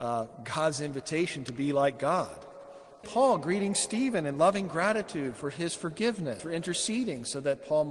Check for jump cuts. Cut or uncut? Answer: cut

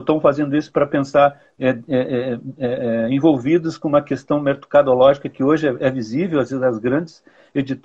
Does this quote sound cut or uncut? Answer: uncut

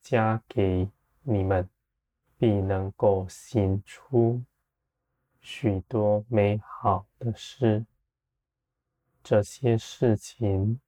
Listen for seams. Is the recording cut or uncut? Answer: cut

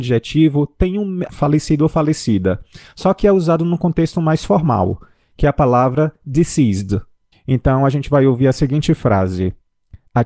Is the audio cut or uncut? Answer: cut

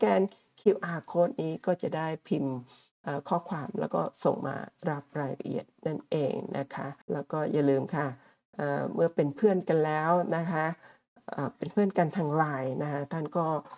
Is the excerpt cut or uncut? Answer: cut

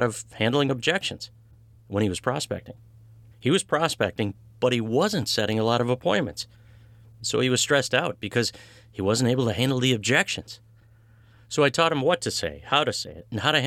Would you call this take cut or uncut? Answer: cut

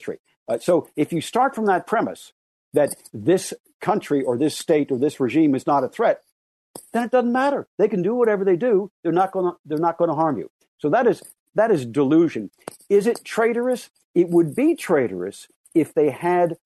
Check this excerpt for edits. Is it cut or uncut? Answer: uncut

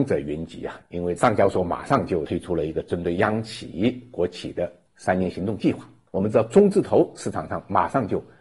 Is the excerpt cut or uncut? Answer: uncut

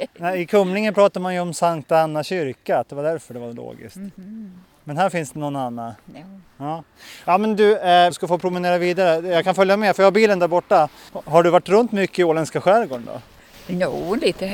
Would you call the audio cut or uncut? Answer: cut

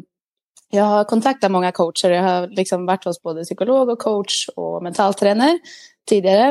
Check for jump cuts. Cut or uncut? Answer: uncut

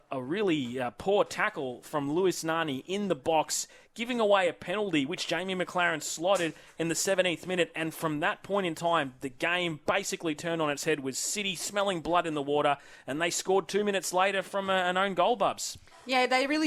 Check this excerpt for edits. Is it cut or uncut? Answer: uncut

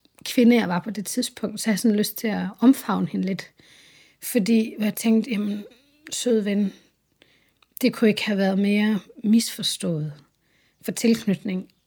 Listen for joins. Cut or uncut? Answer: uncut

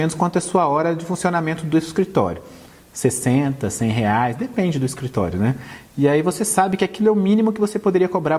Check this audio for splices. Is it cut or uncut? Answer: uncut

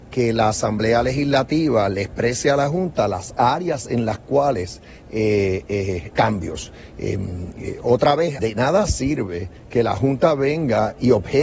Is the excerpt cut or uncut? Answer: cut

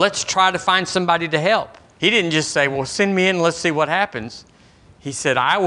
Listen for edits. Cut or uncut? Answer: cut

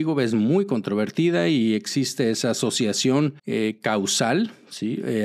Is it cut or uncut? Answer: cut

